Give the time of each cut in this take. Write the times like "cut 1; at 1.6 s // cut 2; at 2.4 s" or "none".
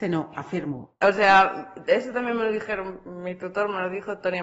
cut 1; at 1.0 s

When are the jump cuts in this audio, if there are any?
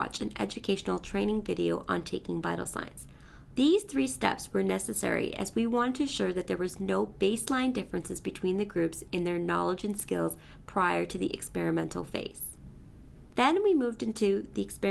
cut 1; at 3.6 s

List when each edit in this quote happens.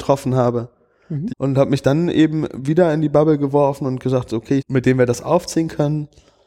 cut 1; at 1.3 s // cut 2; at 4.6 s

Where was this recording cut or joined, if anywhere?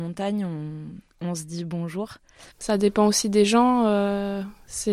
cut 1; at 2.5 s

